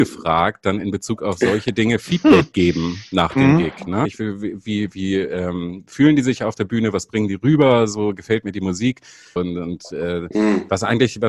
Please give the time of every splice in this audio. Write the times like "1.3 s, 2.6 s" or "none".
4.1 s, 9.4 s